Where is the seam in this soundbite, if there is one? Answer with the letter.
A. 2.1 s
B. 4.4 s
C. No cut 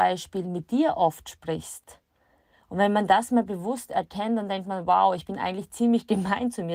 C